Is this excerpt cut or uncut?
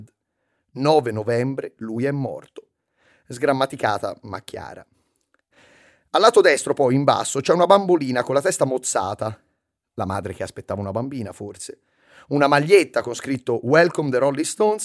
uncut